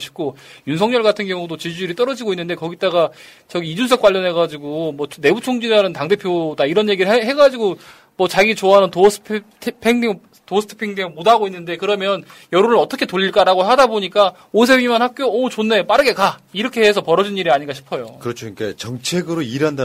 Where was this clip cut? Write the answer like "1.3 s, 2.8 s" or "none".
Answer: none